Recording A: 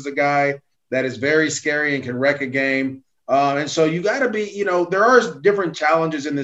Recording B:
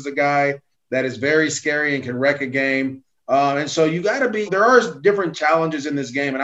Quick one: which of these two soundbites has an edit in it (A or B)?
B